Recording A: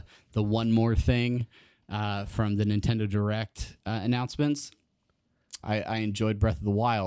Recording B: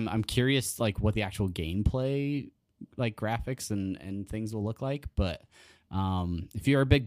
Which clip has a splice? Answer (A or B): A